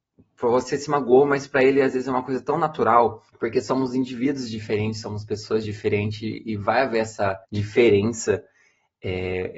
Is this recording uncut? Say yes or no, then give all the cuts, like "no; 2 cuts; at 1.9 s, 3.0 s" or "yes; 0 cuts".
no; 2 cuts; at 3.3 s, 7.4 s